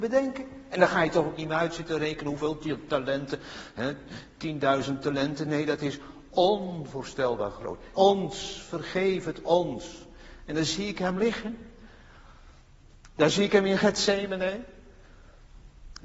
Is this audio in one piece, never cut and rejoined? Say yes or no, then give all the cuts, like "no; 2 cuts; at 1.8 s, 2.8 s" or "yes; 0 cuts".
no; 1 cut; at 8.0 s